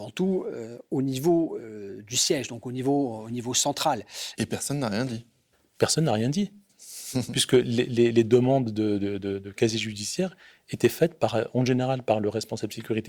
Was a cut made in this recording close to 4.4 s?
yes; 1 cut; at 4.4 s

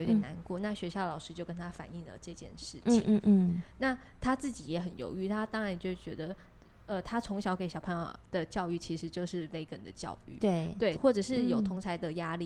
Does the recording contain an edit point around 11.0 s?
yes; 1 cut; at 11.0 s

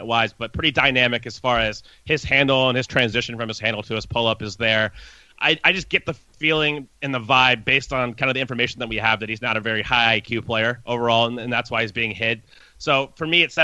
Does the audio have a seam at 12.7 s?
no; 0 cuts

